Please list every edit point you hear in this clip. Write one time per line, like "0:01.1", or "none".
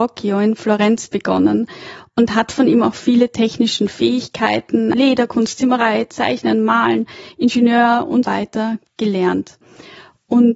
0:04.9
0:08.2